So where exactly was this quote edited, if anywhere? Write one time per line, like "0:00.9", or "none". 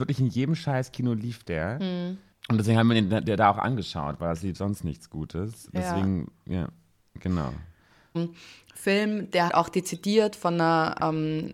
0:08.1
0:09.5